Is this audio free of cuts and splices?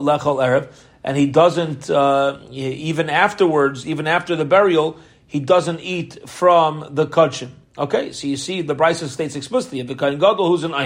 yes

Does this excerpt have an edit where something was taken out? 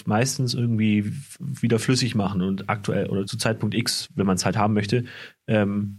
yes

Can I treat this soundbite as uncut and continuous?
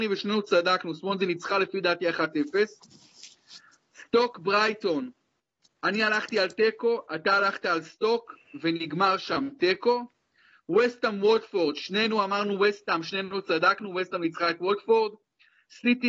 yes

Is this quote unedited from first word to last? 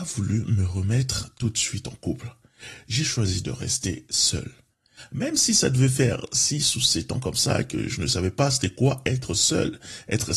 yes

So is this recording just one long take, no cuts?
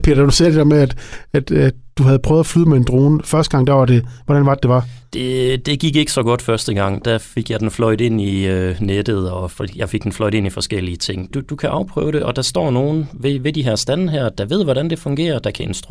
no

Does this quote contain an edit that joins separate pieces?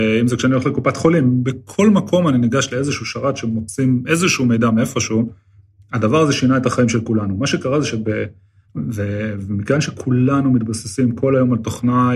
yes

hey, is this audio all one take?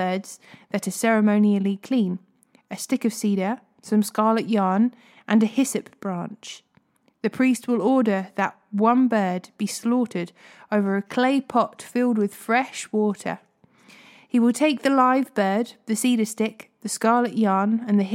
yes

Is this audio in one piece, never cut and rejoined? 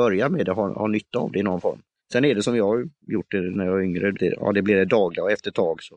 no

